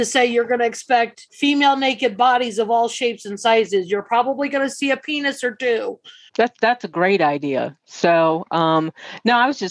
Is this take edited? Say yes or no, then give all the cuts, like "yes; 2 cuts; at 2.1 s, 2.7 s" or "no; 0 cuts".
yes; 2 cuts; at 1.3 s, 6.3 s